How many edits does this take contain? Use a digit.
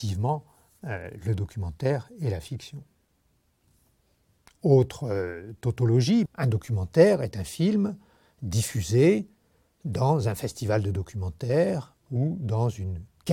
1